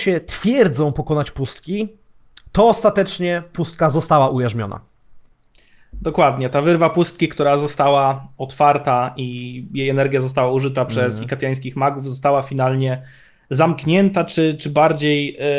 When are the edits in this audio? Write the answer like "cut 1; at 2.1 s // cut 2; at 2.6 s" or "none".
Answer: none